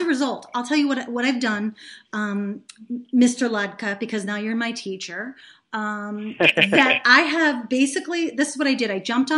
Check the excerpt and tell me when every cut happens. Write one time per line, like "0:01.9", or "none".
none